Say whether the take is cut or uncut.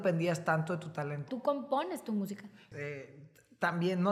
cut